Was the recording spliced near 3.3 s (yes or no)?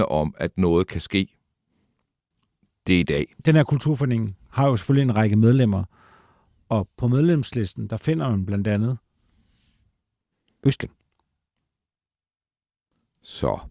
yes